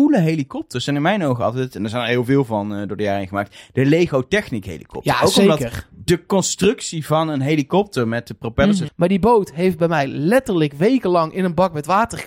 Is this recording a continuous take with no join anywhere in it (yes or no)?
no